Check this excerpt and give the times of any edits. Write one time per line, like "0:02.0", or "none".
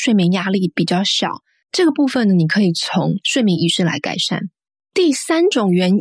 0:01.6
0:04.8